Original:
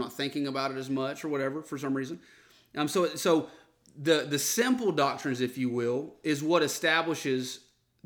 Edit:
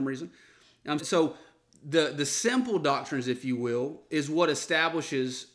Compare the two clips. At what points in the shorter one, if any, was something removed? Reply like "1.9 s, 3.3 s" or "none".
1.0 s